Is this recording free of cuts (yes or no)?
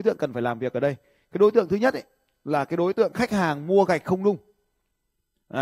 yes